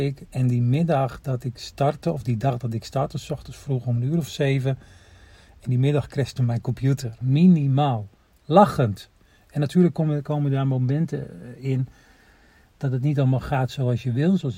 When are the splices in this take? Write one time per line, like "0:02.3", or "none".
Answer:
0:07.2